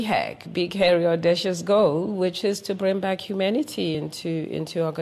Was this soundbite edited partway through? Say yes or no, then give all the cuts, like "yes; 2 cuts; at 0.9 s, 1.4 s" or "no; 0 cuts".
no; 0 cuts